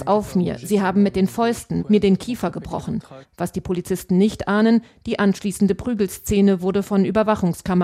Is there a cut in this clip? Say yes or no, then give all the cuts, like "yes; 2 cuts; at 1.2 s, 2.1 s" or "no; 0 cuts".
yes; 2 cuts; at 1.8 s, 3.2 s